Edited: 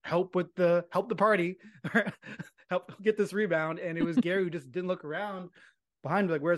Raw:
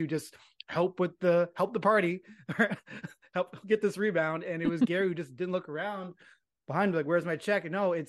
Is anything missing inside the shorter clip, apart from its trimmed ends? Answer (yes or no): no